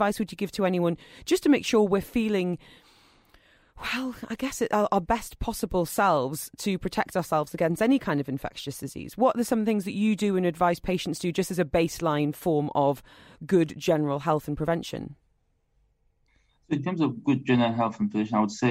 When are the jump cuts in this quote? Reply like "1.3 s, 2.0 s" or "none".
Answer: none